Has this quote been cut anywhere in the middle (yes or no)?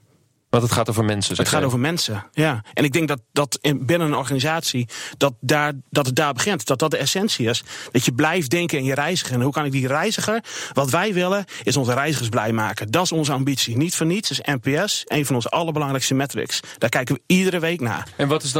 no